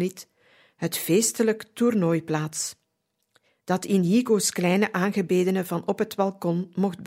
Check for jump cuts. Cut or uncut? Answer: uncut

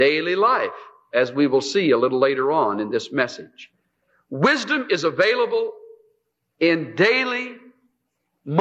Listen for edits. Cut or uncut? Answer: uncut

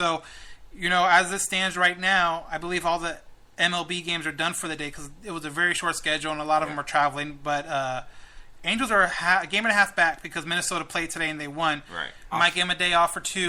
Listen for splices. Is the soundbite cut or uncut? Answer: cut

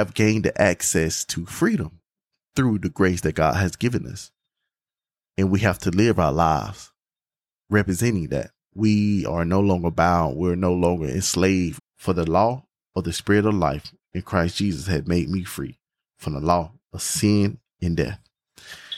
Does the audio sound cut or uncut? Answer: cut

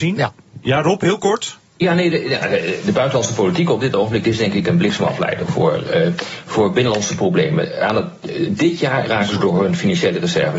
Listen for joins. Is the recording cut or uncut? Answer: cut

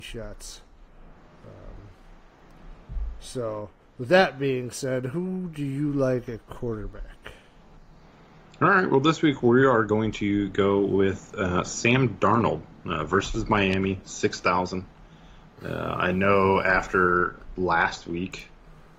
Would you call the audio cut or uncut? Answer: uncut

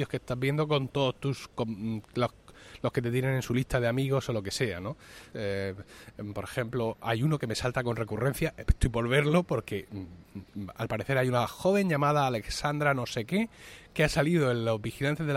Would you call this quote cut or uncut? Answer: cut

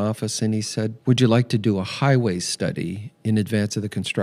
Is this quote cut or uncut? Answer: cut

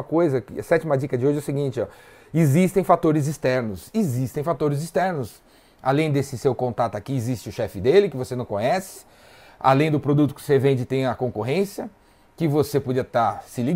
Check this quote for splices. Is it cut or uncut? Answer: uncut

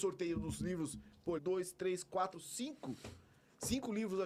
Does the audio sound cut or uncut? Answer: cut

